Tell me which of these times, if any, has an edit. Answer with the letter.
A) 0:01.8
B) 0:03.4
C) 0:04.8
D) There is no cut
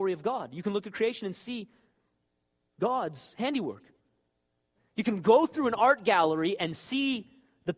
C